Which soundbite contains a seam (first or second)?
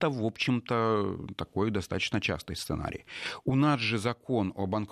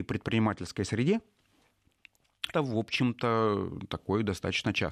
second